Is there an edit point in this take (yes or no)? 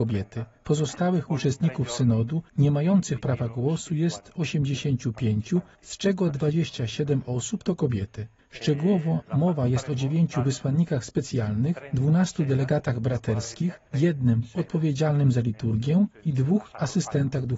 yes